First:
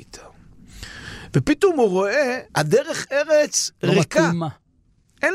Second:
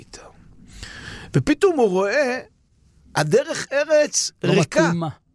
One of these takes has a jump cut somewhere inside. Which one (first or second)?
first